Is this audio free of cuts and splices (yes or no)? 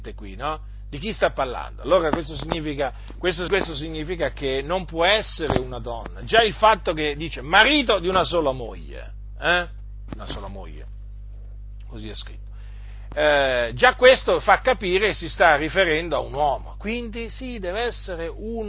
no